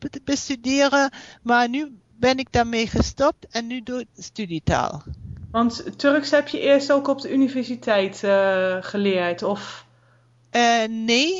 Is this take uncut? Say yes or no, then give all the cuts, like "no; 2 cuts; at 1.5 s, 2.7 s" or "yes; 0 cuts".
no; 1 cut; at 4.0 s